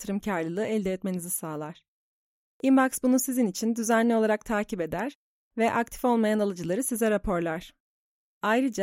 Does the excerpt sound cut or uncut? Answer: uncut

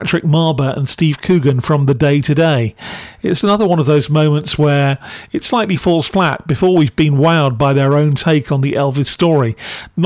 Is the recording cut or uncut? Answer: cut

